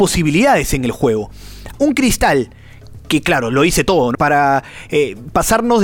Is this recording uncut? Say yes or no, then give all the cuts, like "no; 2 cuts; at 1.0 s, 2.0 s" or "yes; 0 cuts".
no; 2 cuts; at 1.7 s, 4.1 s